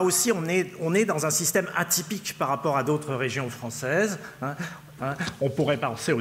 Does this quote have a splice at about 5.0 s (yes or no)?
yes